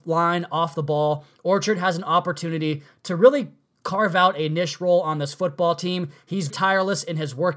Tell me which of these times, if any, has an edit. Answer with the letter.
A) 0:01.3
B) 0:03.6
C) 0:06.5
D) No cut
C